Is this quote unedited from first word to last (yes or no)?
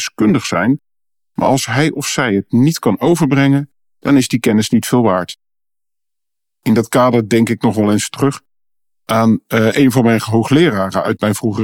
yes